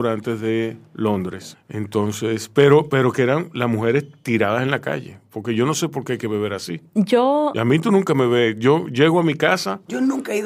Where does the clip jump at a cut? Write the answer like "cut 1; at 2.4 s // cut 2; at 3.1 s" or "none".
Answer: cut 1; at 1.5 s